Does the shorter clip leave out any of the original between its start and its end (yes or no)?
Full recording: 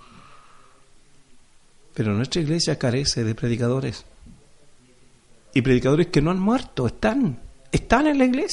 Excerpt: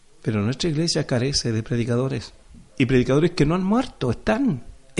yes